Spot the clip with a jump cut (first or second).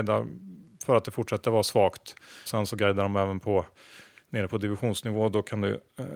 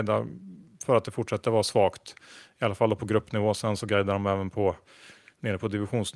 first